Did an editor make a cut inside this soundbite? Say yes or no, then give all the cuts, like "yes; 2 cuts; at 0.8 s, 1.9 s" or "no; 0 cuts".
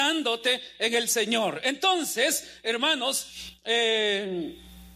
no; 0 cuts